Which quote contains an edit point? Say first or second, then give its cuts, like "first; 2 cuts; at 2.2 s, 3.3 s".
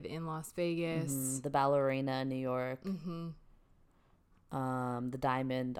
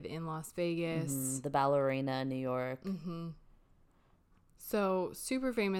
second; 1 cut; at 4.5 s